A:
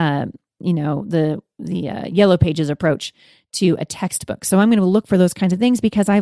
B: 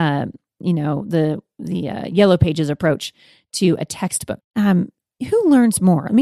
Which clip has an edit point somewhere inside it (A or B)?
B